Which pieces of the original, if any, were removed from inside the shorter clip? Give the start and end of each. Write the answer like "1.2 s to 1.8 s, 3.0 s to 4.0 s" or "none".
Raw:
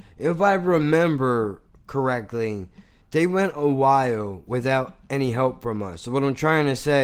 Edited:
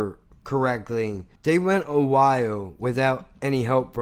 2.8 s to 3.0 s